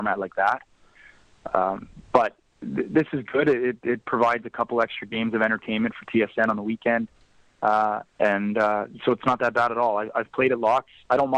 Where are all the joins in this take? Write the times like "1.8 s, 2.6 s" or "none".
none